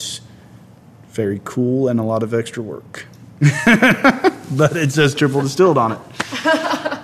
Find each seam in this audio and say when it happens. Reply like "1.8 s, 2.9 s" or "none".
none